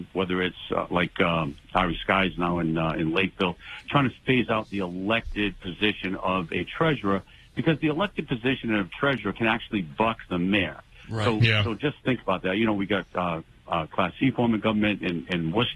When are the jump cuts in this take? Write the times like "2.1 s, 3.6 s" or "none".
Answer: none